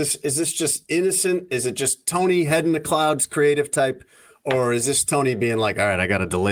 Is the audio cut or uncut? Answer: uncut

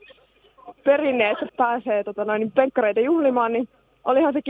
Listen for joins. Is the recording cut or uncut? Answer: cut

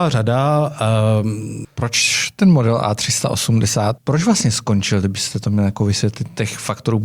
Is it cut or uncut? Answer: cut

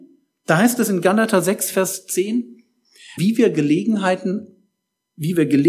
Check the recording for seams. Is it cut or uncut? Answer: cut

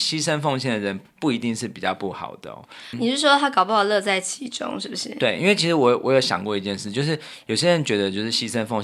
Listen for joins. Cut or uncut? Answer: cut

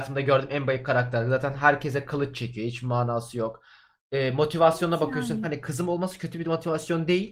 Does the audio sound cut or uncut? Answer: cut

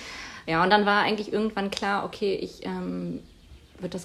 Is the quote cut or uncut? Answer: uncut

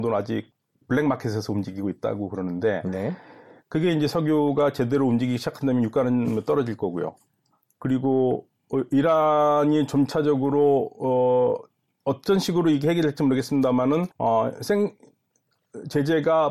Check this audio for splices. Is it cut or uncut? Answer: cut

